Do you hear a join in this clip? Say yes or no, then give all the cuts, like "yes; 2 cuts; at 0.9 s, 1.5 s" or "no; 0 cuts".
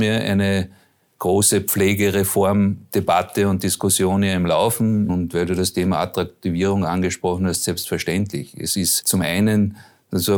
yes; 1 cut; at 5.1 s